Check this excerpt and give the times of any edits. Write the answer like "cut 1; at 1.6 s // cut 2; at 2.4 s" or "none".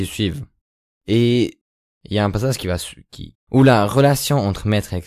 cut 1; at 3.3 s